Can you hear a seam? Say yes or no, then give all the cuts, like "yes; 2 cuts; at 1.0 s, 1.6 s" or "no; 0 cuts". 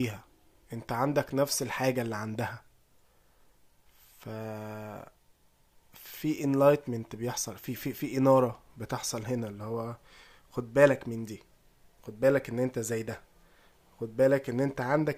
no; 0 cuts